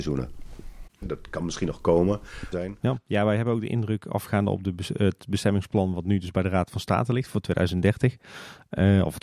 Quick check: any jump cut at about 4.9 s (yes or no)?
no